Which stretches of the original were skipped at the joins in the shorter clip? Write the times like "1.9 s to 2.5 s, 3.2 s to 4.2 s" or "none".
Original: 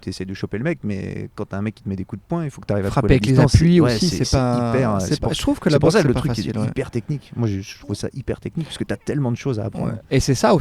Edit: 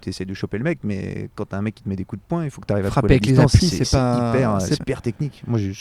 3.6 s to 4.0 s, 5.2 s to 6.7 s